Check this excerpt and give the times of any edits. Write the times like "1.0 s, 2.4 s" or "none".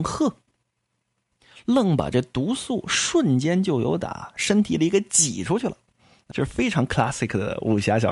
6.3 s